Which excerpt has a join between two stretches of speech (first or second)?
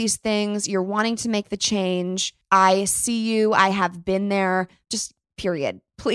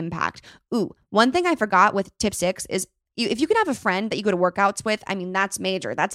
first